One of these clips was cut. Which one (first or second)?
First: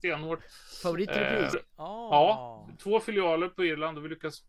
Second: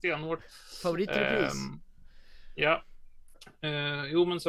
first